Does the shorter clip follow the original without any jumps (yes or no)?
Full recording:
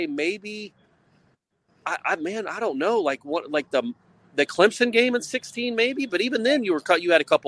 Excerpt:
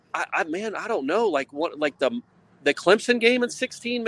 yes